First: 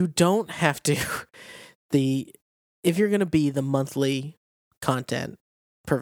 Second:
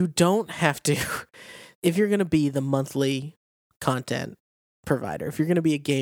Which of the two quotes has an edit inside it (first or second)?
second